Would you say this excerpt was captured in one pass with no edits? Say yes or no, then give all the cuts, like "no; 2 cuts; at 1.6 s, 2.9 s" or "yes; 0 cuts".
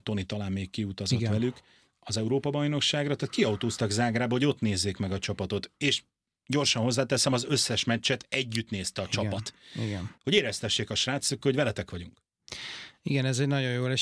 no; 1 cut; at 10.2 s